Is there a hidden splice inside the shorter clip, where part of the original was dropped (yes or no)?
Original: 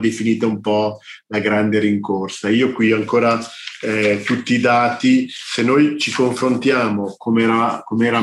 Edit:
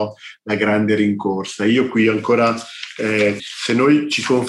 yes